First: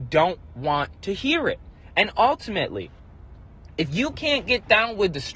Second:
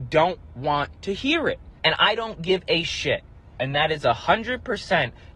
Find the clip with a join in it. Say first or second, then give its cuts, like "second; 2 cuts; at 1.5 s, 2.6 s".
second; 2 cuts; at 1.8 s, 3.6 s